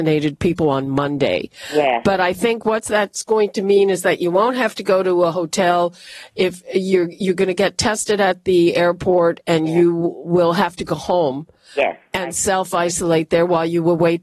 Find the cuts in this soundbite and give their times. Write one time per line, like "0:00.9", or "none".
none